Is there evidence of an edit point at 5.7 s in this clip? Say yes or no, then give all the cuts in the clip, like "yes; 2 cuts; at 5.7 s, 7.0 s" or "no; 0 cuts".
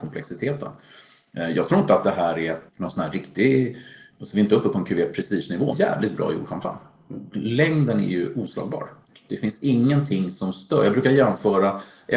yes; 2 cuts; at 2.7 s, 5.7 s